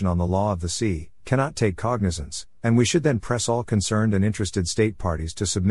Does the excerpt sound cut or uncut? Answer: uncut